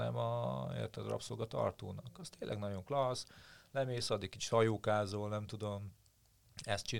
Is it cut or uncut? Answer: uncut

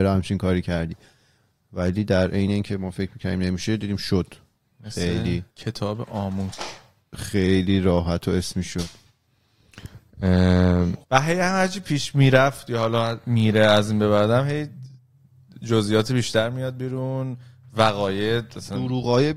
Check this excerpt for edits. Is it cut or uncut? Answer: cut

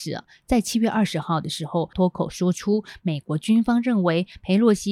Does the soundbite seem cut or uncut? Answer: cut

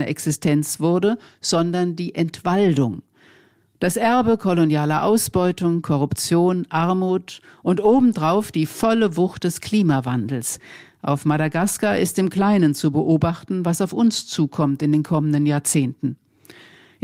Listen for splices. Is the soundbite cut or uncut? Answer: cut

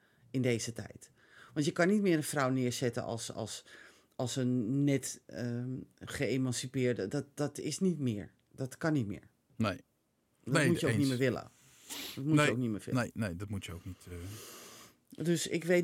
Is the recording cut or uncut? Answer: uncut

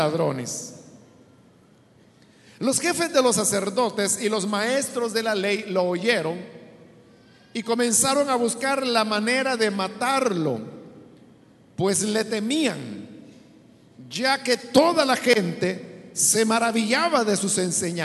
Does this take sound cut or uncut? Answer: uncut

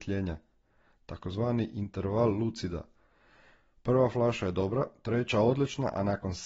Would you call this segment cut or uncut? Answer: uncut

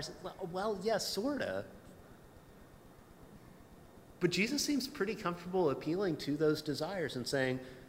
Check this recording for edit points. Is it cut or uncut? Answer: uncut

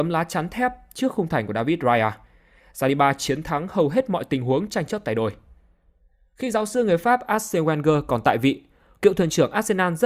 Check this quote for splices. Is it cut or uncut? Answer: uncut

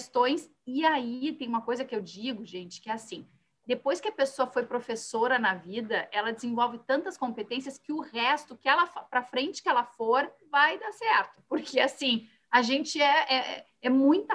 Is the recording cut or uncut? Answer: uncut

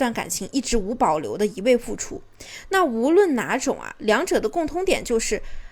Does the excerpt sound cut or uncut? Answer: uncut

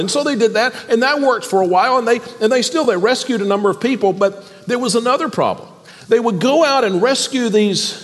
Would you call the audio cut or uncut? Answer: uncut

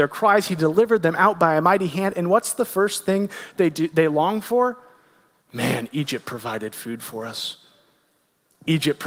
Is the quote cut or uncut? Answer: uncut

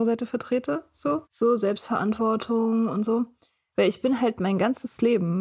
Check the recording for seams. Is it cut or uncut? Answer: cut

